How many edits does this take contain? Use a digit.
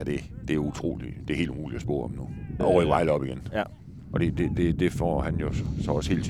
2